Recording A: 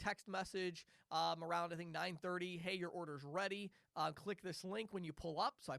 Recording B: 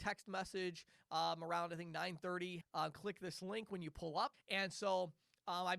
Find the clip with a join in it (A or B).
B